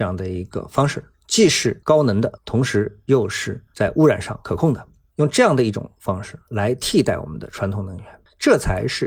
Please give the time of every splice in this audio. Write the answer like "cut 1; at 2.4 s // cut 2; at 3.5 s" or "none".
none